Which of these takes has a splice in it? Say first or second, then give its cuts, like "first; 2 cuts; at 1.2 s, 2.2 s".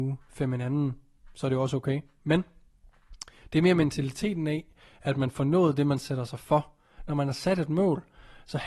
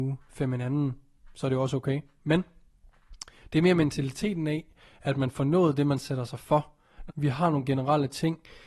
second; 1 cut; at 7.1 s